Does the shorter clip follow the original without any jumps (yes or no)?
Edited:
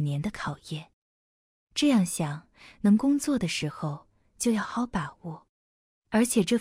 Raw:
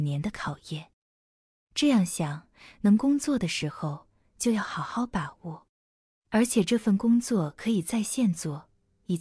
no